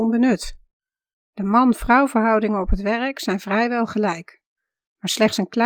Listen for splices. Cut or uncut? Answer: uncut